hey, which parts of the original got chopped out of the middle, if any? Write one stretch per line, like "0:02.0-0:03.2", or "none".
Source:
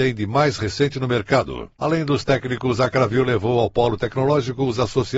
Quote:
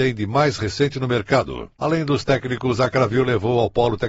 none